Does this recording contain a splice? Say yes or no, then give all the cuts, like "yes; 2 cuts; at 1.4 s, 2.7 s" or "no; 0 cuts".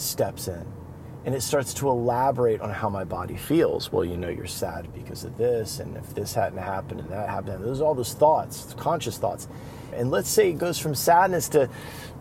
yes; 1 cut; at 9.9 s